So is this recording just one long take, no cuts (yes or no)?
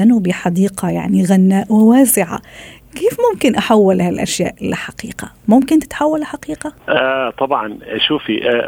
no